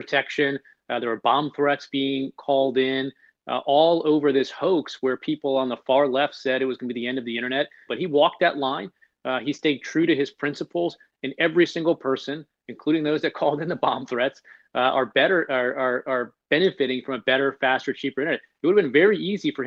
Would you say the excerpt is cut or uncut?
cut